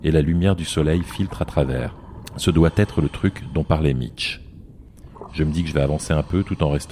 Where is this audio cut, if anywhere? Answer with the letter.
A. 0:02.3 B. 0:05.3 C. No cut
B